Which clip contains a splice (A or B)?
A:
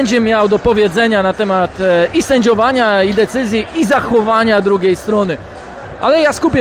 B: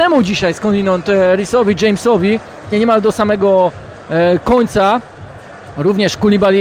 B